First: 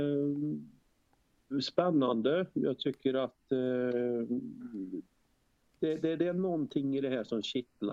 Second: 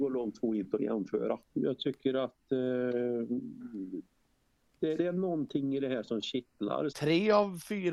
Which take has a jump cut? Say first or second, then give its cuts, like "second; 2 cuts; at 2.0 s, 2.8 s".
second; 3 cuts; at 1.5 s, 5.0 s, 6.9 s